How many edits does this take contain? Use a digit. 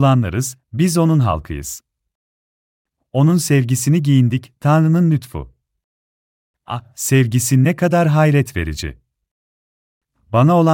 1